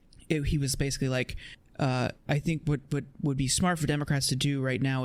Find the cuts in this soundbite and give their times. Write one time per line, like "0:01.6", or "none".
none